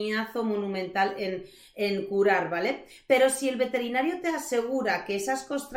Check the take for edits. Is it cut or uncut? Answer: uncut